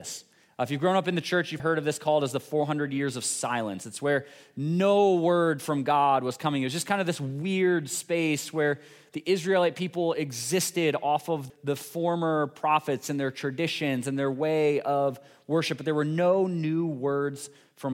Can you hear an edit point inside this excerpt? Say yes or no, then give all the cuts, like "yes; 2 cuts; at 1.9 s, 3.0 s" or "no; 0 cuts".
yes; 2 cuts; at 1.6 s, 11.5 s